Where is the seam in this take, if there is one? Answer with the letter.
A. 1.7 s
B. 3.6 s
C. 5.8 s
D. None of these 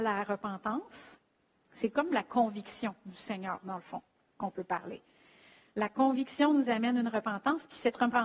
D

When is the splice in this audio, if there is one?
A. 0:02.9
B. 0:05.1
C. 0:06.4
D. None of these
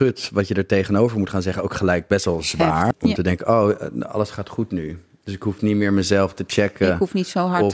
A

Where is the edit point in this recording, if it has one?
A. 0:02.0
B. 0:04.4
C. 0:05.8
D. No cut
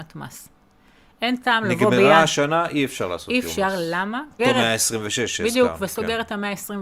B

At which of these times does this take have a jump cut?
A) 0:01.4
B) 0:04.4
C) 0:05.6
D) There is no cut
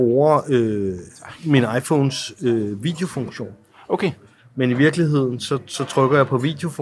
B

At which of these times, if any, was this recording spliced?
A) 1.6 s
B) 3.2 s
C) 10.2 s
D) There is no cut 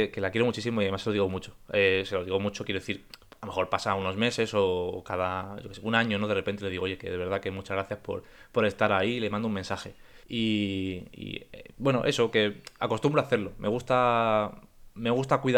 C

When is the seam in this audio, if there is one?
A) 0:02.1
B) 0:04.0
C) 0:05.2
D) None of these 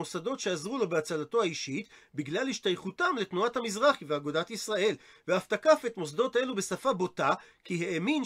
D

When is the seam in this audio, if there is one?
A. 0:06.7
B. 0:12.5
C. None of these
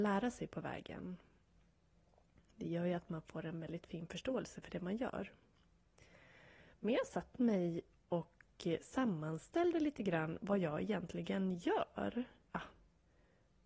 B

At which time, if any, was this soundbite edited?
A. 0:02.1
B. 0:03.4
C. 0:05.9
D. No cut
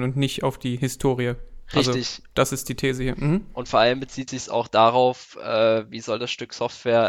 D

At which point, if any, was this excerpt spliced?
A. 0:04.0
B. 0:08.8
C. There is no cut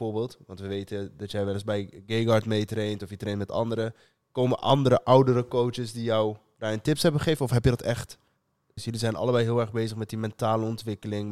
B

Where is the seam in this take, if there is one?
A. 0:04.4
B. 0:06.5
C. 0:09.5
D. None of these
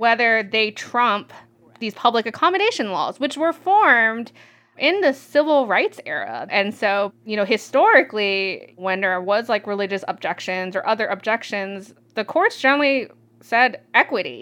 B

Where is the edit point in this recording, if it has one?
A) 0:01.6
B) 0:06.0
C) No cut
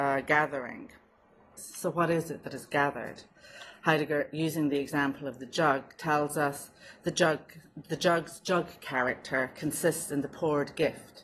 A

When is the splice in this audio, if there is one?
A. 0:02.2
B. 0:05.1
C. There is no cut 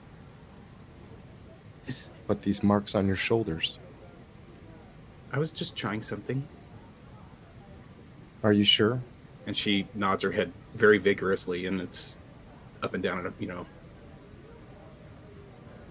A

